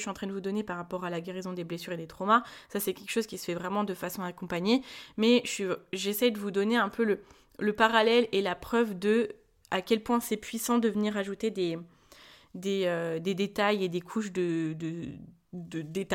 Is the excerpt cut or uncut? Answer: uncut